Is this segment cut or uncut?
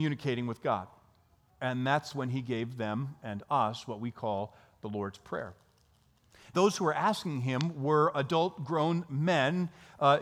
cut